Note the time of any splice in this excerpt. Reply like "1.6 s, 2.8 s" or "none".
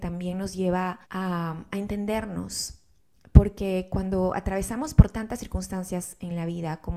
1.0 s